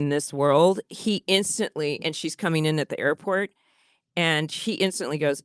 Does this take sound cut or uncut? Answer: uncut